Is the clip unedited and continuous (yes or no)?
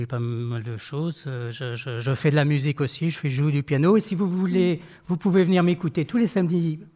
yes